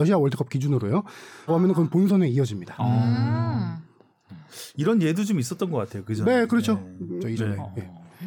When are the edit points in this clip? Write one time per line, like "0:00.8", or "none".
0:01.5
0:07.2